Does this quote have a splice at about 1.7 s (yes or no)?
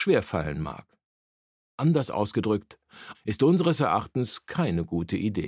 no